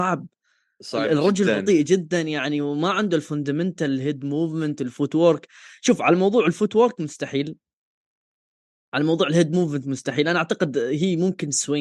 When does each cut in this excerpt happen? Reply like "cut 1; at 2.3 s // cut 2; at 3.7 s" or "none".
none